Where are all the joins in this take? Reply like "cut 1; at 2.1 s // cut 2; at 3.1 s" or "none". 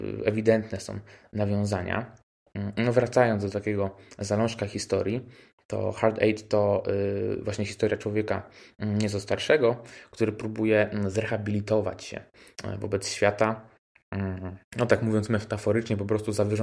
cut 1; at 14.7 s